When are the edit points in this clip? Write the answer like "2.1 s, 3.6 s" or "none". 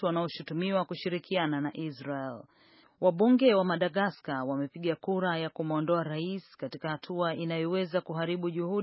2.8 s